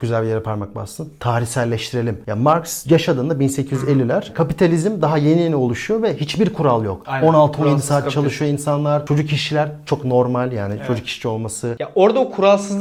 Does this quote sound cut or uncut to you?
uncut